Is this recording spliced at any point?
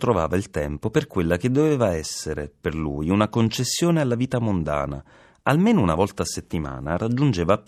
no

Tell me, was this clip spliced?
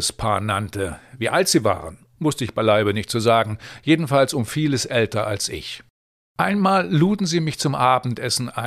no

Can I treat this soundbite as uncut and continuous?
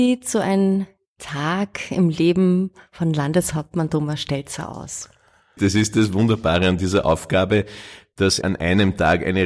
no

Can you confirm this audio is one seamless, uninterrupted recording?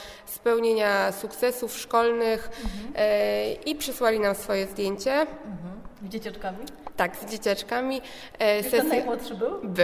yes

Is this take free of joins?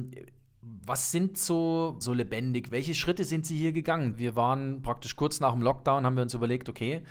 no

